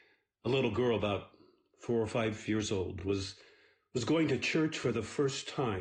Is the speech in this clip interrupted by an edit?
no; 0 cuts

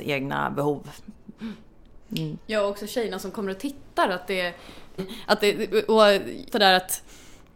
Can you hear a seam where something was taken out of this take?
yes; 2 cuts; at 5.0 s, 6.5 s

